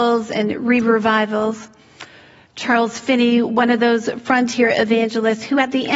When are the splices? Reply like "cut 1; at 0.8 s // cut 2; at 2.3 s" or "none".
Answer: none